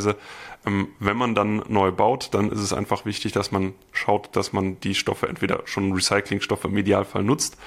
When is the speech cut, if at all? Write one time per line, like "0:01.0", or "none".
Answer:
none